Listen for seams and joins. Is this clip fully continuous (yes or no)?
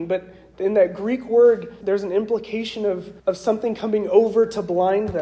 no